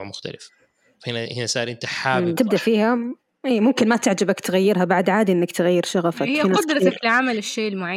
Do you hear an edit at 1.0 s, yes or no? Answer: no